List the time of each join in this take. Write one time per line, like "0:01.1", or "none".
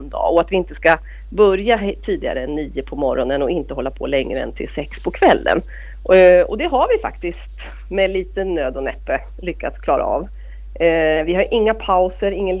none